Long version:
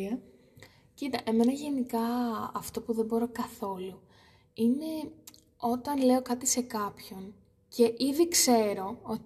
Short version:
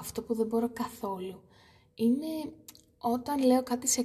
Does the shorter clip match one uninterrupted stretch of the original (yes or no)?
yes